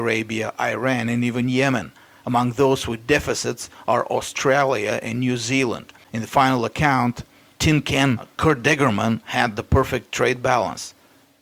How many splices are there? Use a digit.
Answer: 1